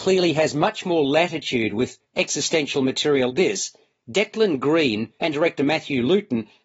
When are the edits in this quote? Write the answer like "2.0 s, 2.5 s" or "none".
3.3 s, 5.2 s